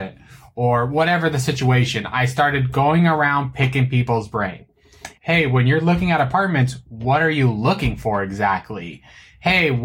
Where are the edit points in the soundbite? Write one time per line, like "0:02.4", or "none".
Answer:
0:05.2